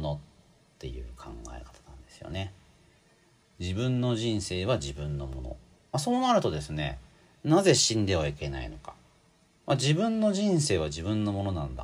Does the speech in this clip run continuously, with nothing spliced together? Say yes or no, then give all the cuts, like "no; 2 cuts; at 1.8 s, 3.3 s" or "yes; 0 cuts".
yes; 0 cuts